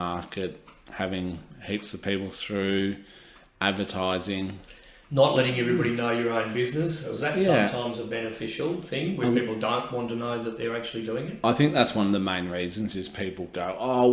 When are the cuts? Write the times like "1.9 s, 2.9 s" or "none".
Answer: none